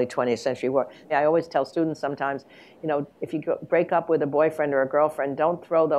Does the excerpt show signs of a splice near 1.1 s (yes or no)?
yes